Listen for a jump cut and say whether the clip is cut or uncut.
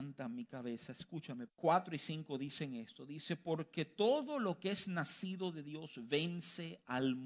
cut